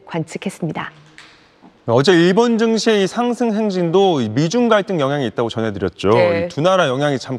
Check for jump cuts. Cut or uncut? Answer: uncut